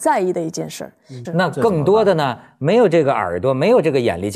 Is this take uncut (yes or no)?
no